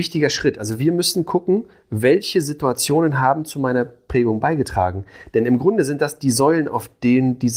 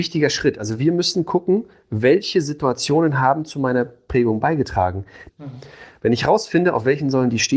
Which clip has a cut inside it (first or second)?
second